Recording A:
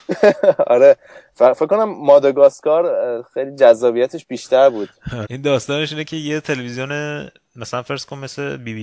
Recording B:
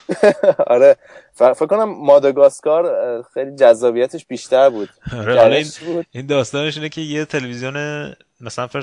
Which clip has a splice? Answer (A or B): A